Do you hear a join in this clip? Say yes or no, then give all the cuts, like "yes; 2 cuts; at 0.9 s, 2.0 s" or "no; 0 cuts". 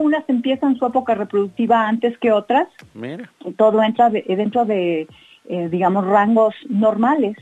no; 0 cuts